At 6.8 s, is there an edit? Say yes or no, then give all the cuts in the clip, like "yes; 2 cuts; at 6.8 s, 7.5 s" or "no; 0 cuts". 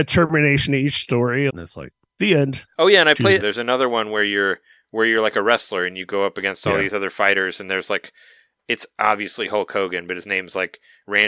no; 2 cuts; at 1.5 s, 3.4 s